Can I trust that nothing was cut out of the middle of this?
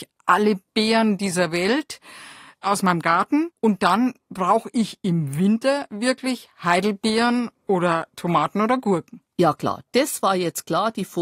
yes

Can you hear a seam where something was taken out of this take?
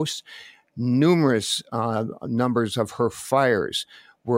no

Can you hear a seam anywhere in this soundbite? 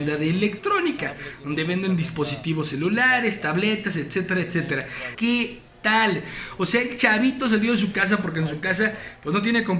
yes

